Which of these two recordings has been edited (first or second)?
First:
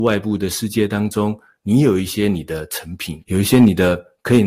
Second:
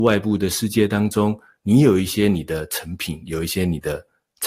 first